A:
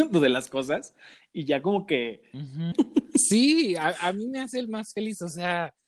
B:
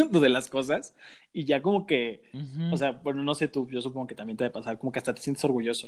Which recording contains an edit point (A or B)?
A